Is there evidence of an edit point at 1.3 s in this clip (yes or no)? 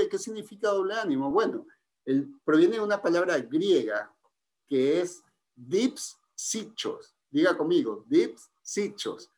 no